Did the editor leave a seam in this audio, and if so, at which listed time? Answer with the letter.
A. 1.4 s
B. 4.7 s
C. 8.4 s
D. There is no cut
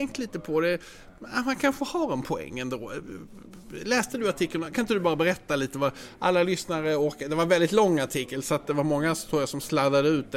D